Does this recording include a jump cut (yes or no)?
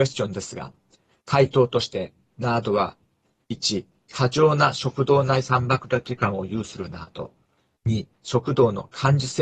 yes